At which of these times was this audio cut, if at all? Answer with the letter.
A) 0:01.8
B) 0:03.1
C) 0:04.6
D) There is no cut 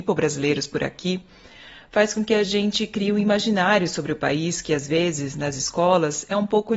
D